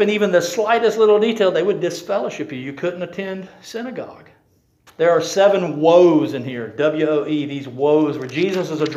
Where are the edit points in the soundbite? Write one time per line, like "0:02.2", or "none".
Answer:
0:04.9